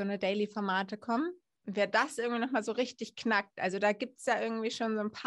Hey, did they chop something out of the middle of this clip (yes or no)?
yes